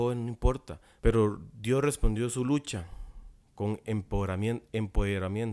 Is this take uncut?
no; 1 cut; at 1.0 s

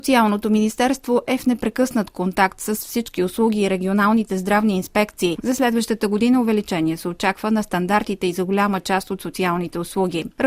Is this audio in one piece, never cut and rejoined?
no; 1 cut; at 5.4 s

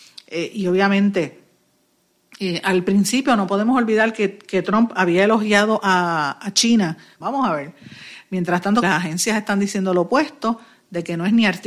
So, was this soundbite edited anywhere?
yes; 2 cuts; at 7.2 s, 8.8 s

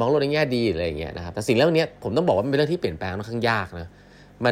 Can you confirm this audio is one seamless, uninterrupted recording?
yes; 0 cuts

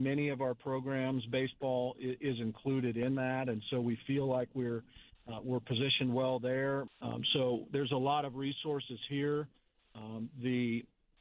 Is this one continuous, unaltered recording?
no; 1 cut; at 6.9 s

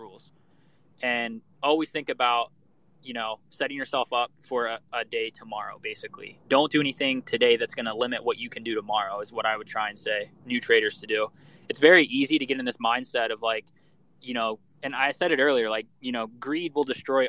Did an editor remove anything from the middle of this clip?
no; 0 cuts

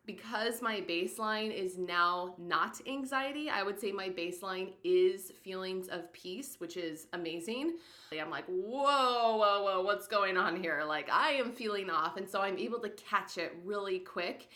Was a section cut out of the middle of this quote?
yes; 1 cut; at 8.1 s

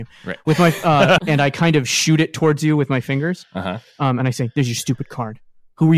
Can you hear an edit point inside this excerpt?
yes; 1 cut; at 1.2 s

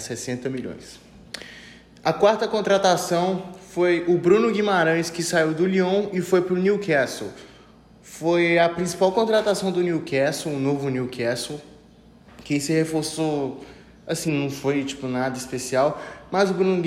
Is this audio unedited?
no; 1 cut; at 14.3 s

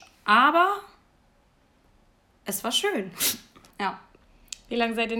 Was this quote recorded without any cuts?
no; 1 cut; at 3.7 s

